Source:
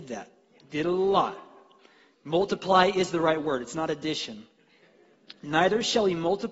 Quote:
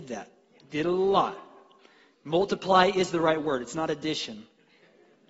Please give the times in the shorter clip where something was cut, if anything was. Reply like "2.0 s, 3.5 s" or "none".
none

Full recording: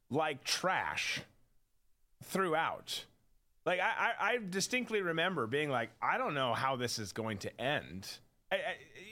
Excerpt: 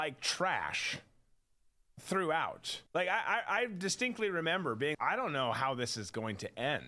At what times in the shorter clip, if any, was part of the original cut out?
2.9 s, 4.9 s

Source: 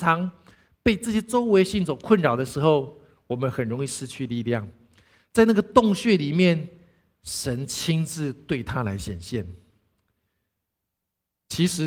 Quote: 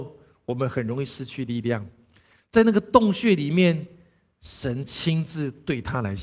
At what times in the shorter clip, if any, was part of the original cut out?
none

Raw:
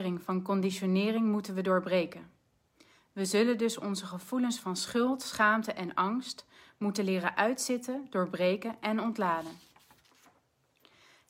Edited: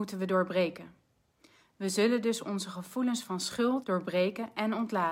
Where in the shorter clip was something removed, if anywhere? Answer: 3.8 s

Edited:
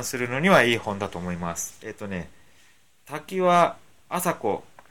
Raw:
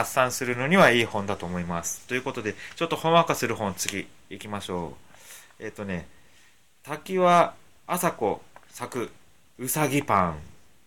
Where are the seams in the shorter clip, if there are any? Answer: 1.8 s

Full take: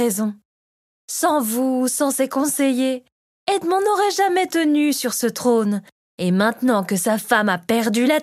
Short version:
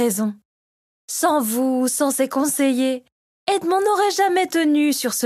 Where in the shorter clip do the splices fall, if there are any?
none

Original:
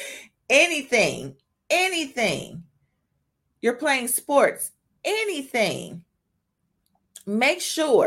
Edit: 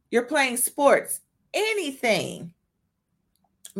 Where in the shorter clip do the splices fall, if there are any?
none

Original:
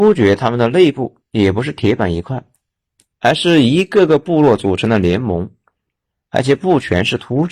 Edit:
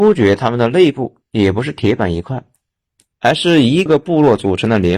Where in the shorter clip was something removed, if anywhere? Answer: 3.9 s

